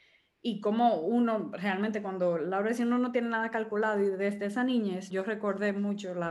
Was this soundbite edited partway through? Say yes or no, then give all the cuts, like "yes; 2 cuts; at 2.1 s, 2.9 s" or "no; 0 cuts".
yes; 1 cut; at 5.1 s